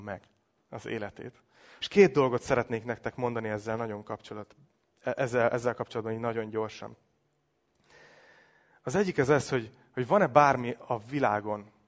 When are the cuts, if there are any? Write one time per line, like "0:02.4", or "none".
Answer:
0:01.8